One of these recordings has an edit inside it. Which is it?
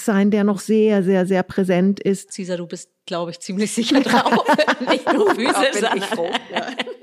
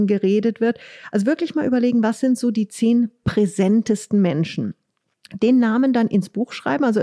first; 1 cut; at 2.3 s

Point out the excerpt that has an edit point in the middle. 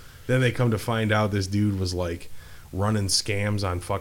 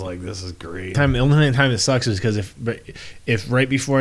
second; 1 cut; at 0.9 s

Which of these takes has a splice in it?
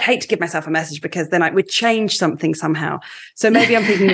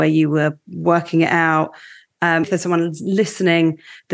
second; 1 cut; at 2.4 s

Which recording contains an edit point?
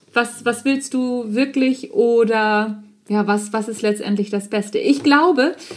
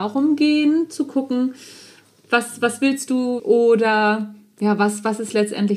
second; 1 cut; at 3.4 s

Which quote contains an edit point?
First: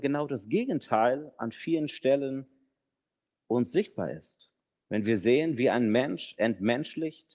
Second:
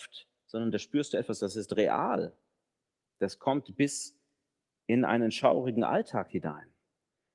first; 1 cut; at 4.8 s

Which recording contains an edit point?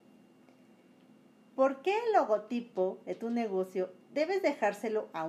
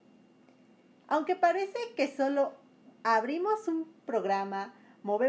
second; 1 cut; at 1.0 s

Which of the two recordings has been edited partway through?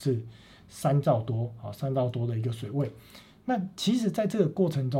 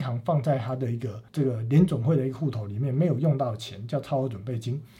second; 1 cut; at 1.3 s

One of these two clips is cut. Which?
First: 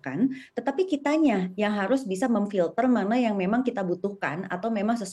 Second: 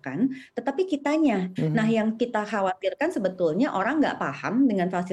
second; 1 cut; at 1.6 s

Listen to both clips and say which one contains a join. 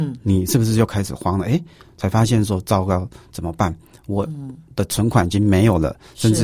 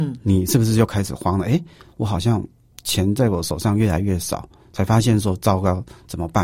first; 1 cut; at 1.9 s

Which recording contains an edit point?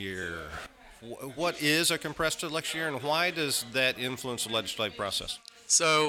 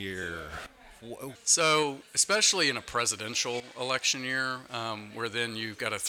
second; 1 cut; at 1.4 s

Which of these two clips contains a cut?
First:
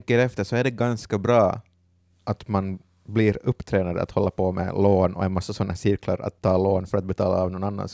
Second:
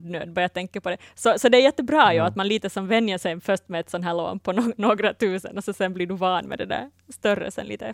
second; 1 cut; at 4.4 s

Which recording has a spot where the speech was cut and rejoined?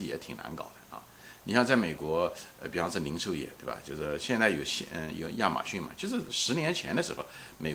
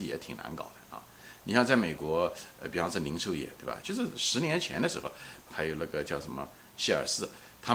second; 2 cuts; at 3.8 s, 5.4 s

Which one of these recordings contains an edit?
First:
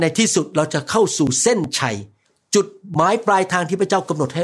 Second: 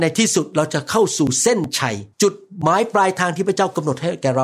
second; 1 cut; at 2.1 s

